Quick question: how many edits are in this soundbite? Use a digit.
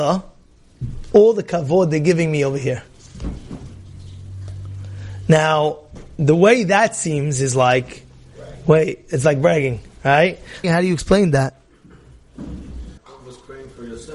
2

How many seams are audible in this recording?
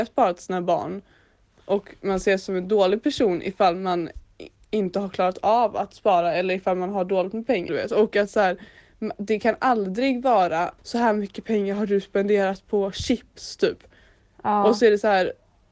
2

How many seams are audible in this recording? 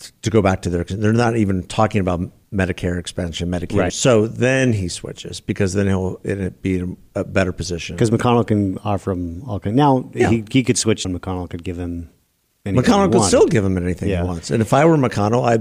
2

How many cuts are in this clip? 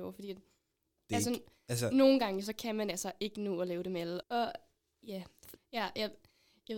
2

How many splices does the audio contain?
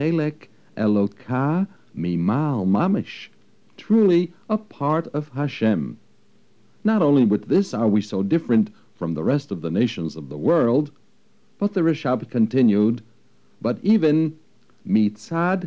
0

